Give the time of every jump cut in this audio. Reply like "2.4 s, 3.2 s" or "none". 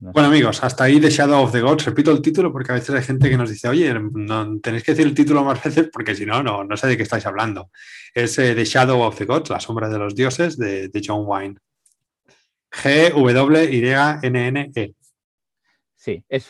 none